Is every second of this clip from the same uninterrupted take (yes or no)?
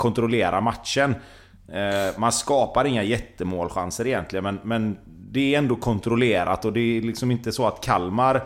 yes